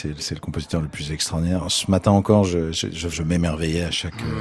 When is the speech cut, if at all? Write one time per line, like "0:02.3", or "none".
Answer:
0:03.1